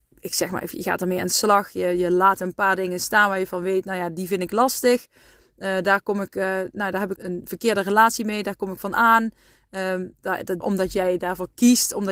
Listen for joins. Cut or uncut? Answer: cut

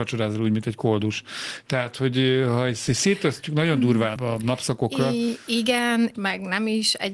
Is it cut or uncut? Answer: cut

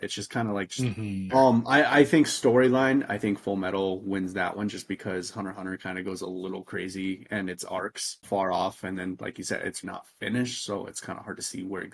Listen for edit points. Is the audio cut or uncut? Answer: cut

